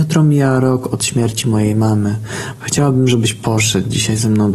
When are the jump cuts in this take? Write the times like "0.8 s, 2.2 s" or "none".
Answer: 2.6 s

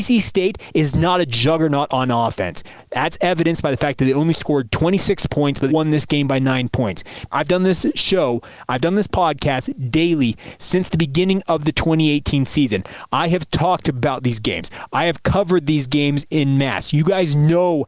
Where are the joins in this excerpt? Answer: 5.7 s, 7.3 s

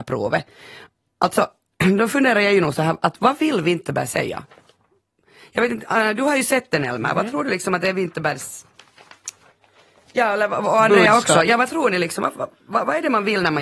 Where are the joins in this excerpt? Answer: none

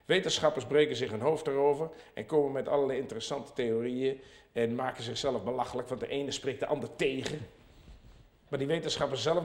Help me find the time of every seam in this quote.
8.5 s

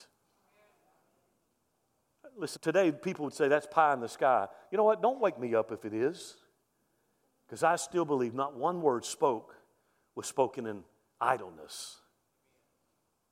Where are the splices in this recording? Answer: 2.6 s

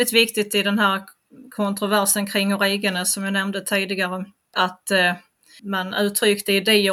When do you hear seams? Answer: 5.6 s

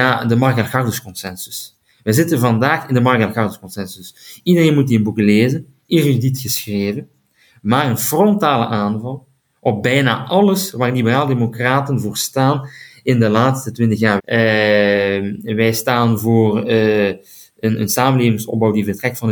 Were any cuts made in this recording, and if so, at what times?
14.2 s

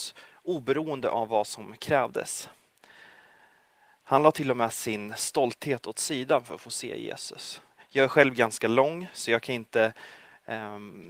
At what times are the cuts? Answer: none

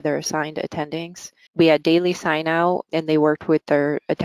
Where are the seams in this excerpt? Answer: 1.5 s, 2.9 s

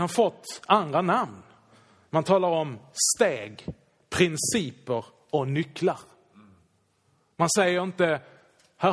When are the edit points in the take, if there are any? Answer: none

